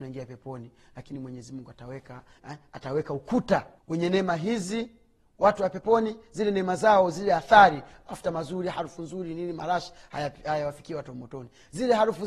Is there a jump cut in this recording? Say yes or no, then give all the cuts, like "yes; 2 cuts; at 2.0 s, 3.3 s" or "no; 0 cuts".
yes; 2 cuts; at 2.4 s, 3.8 s